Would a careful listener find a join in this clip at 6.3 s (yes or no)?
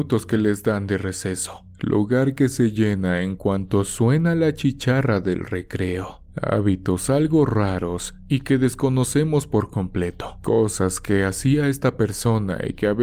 yes